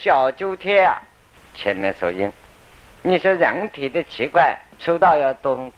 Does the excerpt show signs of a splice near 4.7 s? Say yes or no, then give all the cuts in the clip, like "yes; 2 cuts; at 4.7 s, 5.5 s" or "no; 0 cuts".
yes; 2 cuts; at 1.4 s, 4.7 s